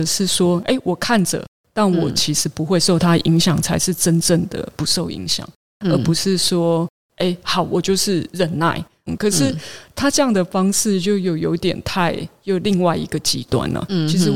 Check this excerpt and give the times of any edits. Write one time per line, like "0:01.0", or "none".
0:09.1